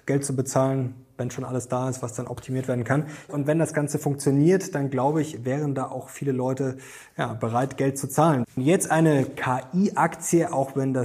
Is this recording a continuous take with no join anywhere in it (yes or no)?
no